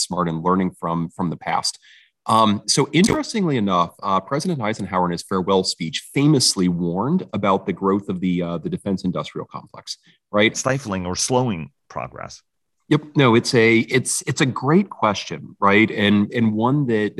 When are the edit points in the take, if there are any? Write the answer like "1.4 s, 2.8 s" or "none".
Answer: 10.5 s